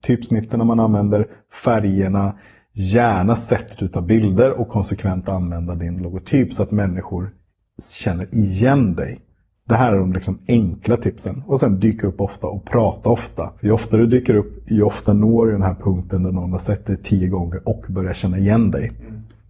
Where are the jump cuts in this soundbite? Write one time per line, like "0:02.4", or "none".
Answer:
0:13.6